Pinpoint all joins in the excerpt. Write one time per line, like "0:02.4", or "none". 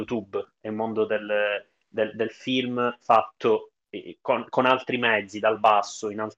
none

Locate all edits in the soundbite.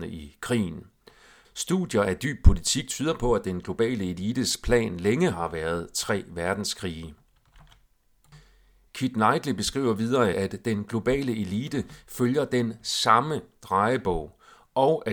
0:01.4
0:08.9
0:10.3

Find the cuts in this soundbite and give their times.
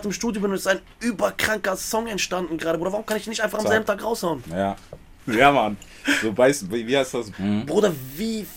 0:05.2
0:07.3

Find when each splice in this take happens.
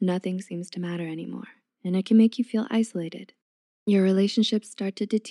none

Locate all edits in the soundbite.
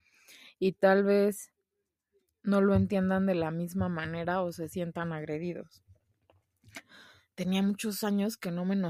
none

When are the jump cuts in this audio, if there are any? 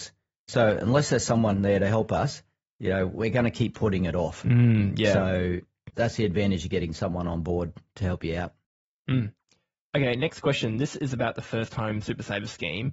0:05.9

